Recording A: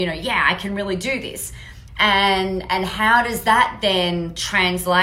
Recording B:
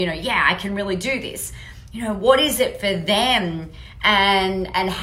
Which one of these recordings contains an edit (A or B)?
A